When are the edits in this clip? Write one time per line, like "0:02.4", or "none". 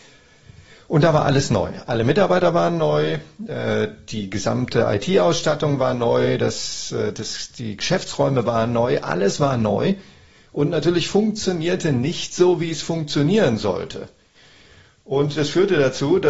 none

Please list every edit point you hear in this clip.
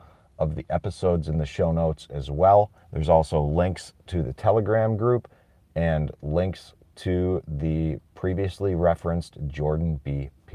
0:02.8

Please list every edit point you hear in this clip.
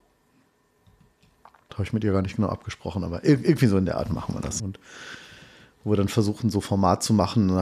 0:01.7
0:04.6

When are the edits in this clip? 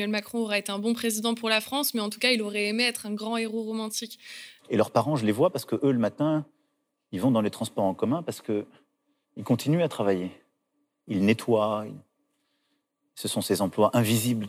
0:04.6

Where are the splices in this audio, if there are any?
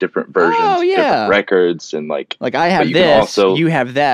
none

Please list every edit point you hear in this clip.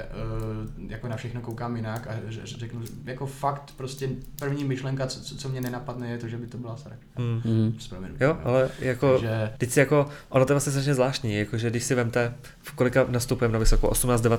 0:09.6

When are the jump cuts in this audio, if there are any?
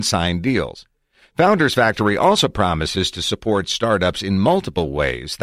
none

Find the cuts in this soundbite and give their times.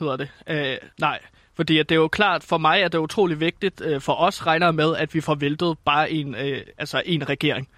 0:00.9

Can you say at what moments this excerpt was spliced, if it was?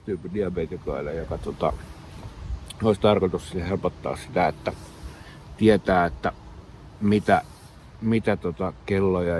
none

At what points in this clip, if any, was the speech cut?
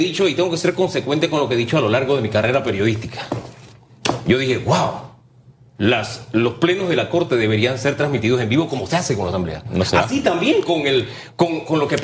none

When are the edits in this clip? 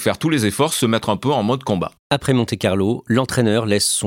none

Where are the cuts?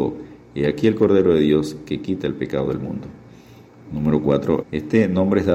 0:04.6

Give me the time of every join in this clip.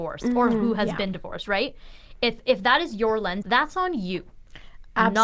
0:03.4

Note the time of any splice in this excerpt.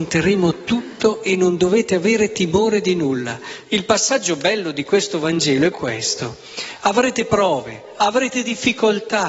0:05.7

